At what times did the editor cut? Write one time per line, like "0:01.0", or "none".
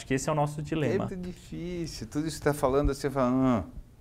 0:01.1